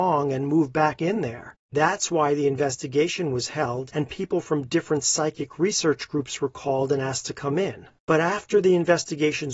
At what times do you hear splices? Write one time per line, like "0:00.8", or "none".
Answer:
0:08.0

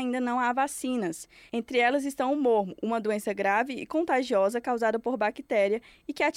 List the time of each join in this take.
none

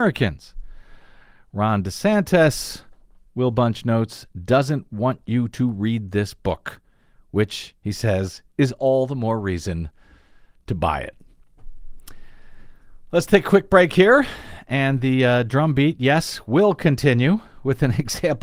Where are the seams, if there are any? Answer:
none

